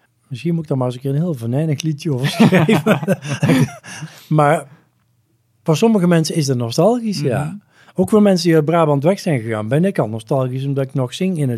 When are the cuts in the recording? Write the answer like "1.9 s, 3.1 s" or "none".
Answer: none